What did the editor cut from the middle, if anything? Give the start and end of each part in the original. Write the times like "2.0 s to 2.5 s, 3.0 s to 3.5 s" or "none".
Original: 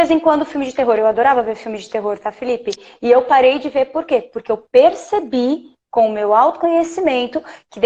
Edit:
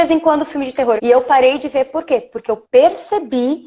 1.0 s to 3.0 s